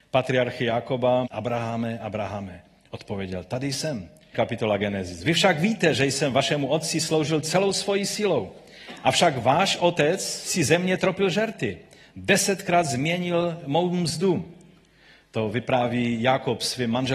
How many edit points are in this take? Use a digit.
2